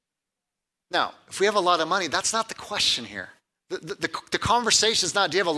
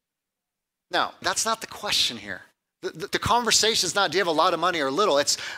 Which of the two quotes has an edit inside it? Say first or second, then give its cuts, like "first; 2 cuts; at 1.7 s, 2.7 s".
second; 2 cuts; at 1.2 s, 3.1 s